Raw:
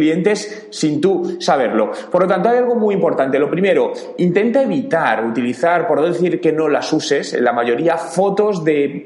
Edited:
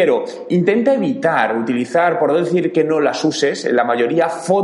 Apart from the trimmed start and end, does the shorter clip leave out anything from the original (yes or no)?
no